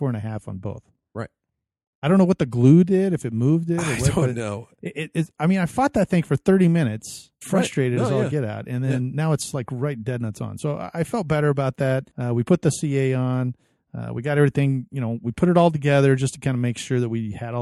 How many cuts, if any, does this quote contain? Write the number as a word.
one